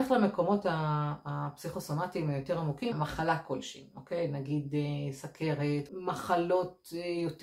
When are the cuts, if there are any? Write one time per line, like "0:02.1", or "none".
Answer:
0:02.9
0:05.9